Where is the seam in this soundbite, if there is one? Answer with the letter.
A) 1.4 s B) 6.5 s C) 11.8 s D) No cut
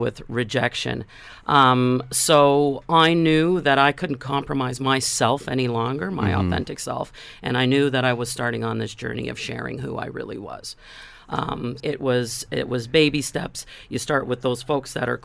C